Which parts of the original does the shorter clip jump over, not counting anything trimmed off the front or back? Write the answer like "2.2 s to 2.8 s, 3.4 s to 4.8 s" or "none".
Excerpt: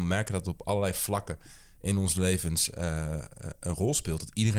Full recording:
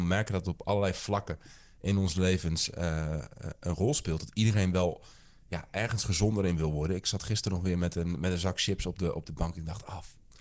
none